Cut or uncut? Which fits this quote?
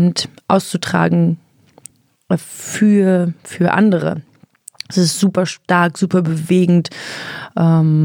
uncut